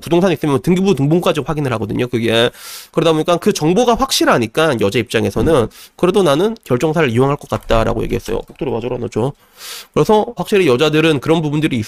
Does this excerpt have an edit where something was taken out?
yes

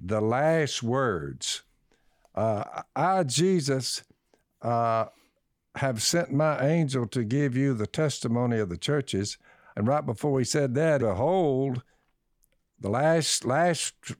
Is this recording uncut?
no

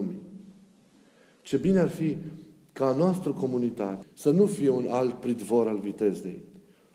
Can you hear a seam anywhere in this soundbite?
yes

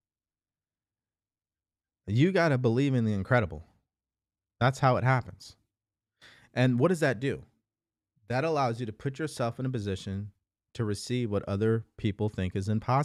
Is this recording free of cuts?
yes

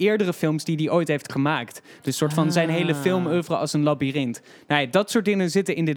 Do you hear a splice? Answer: no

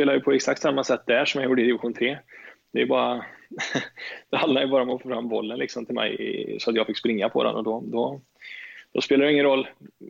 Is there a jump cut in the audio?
no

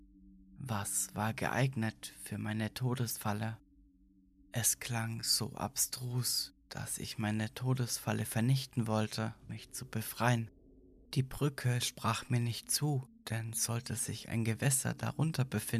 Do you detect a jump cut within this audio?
yes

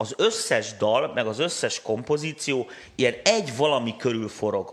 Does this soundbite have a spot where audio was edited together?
no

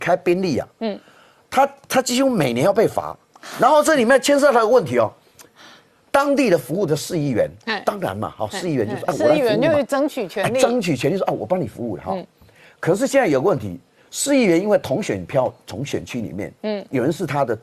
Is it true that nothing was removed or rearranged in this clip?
yes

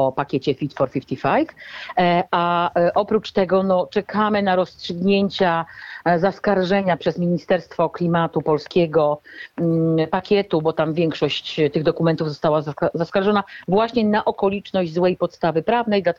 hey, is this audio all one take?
yes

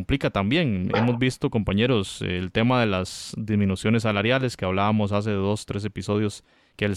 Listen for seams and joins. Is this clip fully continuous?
yes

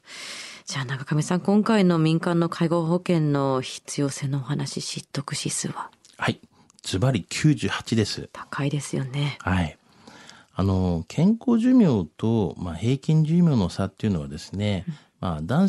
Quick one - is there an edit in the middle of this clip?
no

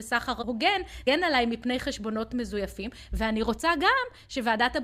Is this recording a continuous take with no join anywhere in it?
no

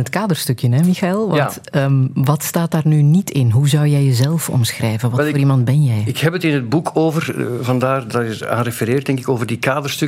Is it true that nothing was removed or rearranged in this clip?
yes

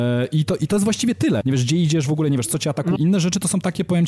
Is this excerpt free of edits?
no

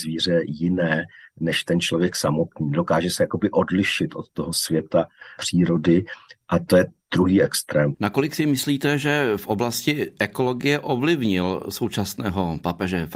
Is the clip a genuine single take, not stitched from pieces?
no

